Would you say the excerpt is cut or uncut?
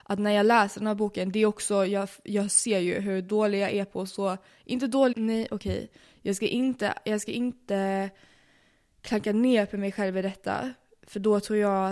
cut